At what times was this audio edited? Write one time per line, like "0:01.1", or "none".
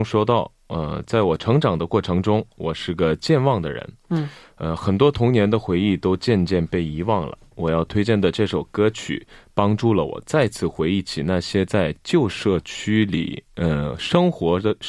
none